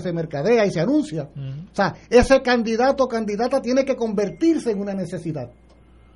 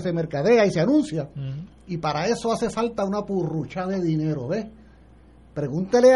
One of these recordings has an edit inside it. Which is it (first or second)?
second